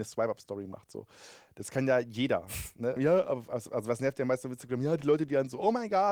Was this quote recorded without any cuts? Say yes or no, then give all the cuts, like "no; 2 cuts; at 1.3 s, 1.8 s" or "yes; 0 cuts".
no; 1 cut; at 3.0 s